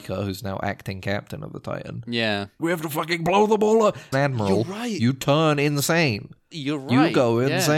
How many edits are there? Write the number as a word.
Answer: three